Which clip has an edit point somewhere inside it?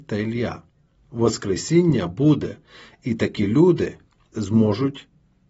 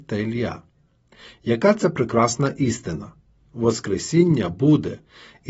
first; 2 cuts; at 1.0 s, 4.3 s

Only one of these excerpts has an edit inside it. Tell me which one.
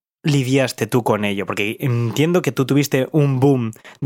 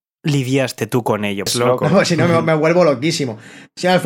second; 1 cut; at 1.5 s

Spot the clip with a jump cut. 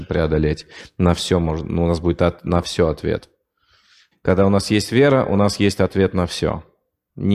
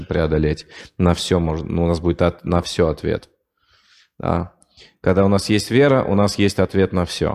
first; 1 cut; at 4.1 s

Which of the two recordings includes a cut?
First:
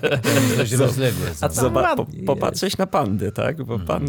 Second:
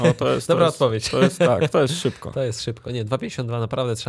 second; 1 cut; at 1.7 s

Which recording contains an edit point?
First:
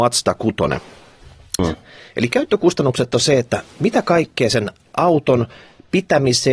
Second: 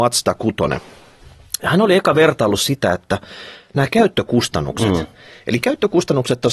first; 1 cut; at 1.6 s

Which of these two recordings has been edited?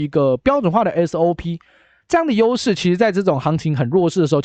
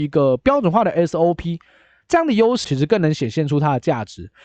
second; 1 cut; at 2.6 s

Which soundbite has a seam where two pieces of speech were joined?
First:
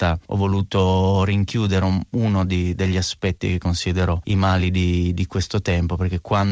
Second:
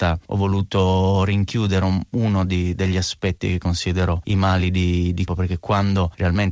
second; 1 cut; at 5.3 s

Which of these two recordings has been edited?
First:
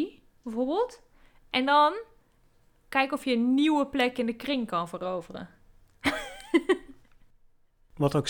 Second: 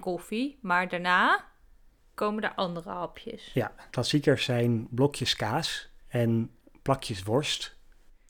second; 2 cuts; at 3.9 s, 6.0 s

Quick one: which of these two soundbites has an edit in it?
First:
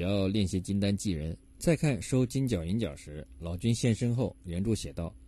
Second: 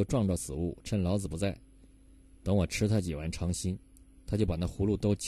first; 1 cut; at 1.5 s

